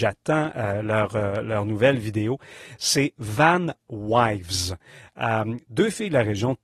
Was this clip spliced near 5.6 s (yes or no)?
yes